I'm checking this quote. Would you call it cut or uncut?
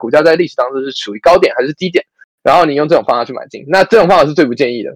uncut